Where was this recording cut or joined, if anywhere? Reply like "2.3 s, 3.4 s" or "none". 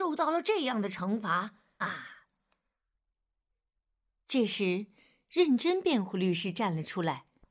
1.8 s